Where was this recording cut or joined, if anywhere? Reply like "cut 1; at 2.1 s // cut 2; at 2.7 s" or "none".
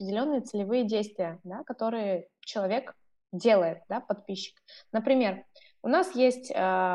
none